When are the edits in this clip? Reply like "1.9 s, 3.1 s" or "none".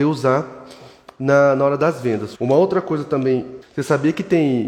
2.3 s, 3.6 s